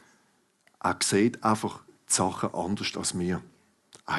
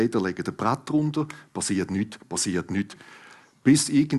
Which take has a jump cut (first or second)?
second